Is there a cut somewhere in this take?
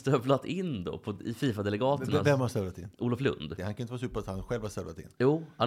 yes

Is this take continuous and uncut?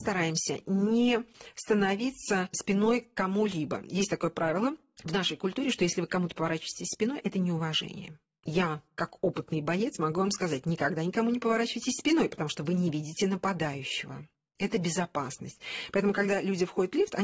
yes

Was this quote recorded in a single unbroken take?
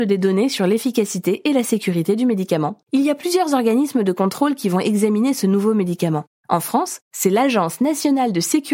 no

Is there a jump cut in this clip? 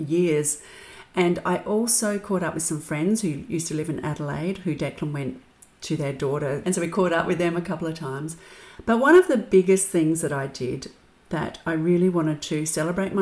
yes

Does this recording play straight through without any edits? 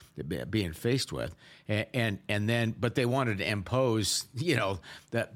yes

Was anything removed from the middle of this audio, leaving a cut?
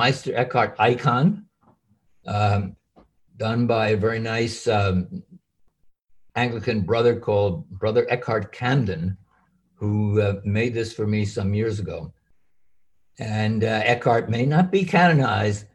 no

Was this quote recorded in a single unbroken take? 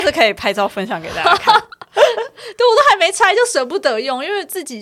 yes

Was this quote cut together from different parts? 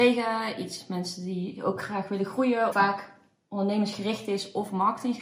yes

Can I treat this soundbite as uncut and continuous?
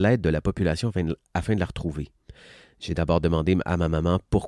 yes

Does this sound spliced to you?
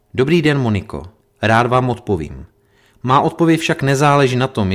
yes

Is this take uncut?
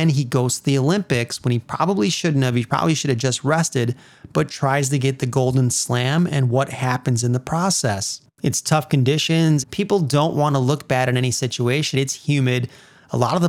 no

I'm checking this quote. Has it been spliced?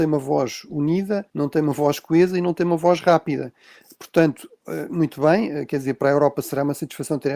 yes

